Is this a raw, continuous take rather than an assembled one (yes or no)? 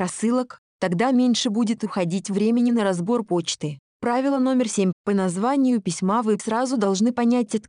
no